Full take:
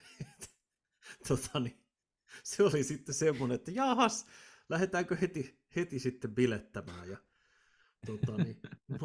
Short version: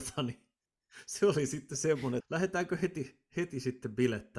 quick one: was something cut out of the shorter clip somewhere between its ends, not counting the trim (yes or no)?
yes